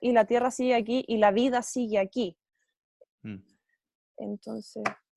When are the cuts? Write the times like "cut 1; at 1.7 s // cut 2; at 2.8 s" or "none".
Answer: cut 1; at 3.0 s